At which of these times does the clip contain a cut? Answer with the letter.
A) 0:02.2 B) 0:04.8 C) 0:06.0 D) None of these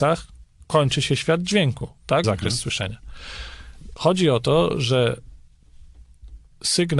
A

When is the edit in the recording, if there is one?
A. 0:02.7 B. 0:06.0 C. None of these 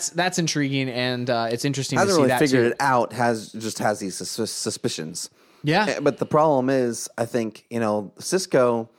C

